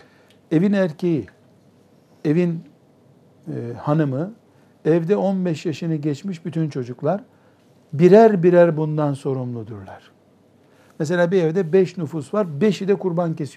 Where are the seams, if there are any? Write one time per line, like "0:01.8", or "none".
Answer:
none